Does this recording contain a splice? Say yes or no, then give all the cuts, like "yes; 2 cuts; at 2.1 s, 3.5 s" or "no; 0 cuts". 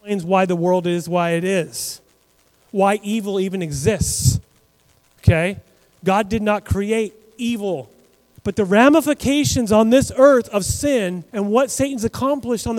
yes; 2 cuts; at 8.4 s, 11.3 s